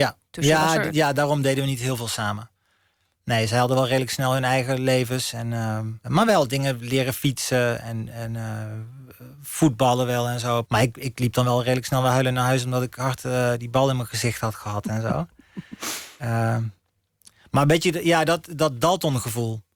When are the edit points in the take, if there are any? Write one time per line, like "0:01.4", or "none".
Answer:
0:06.0
0:10.6